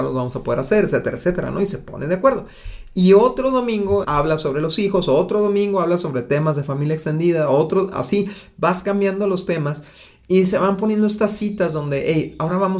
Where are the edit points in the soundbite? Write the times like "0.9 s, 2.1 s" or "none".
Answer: 4.0 s